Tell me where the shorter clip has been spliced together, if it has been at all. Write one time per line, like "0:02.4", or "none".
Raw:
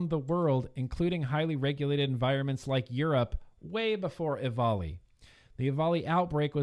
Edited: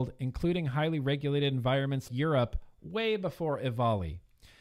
0:02.1